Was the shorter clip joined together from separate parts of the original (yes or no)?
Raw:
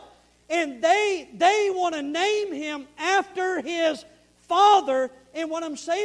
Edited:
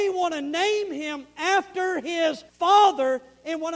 yes